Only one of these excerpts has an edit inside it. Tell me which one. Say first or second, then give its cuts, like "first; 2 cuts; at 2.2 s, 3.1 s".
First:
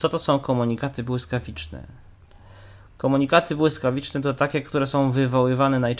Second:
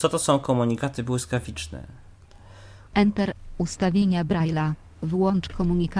second; 1 cut; at 2.9 s